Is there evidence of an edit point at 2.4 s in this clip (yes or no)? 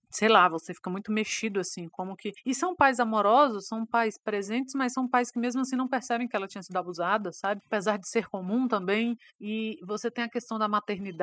no